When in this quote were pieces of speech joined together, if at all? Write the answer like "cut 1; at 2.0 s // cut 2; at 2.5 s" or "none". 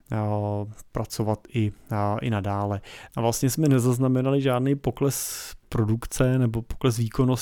cut 1; at 3.1 s